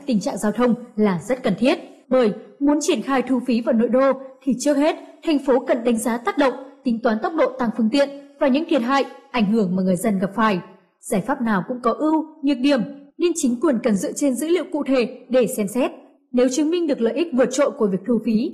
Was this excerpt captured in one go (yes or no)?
no